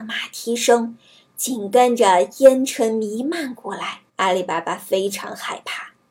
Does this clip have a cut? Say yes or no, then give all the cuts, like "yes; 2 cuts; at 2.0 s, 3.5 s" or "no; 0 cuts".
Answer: yes; 1 cut; at 4.1 s